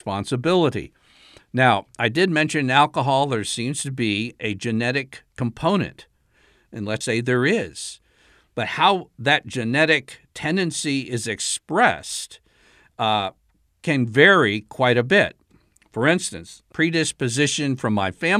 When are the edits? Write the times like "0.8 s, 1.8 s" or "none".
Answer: 7.0 s, 16.7 s